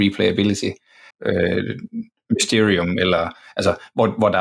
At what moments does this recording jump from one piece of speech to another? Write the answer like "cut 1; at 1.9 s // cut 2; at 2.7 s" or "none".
cut 1; at 1.1 s